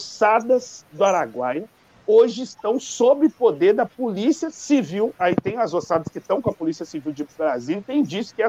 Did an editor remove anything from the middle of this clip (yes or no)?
no